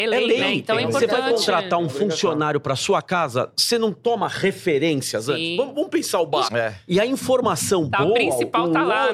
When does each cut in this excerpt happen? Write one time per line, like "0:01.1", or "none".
0:06.5